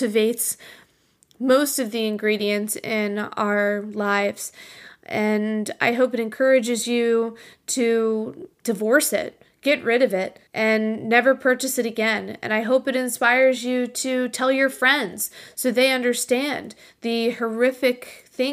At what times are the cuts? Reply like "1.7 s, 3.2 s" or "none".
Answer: 8.5 s, 10.5 s